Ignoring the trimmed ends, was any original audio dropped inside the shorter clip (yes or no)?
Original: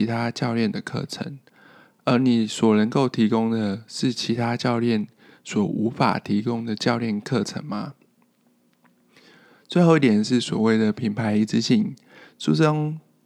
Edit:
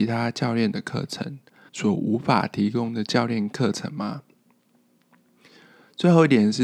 yes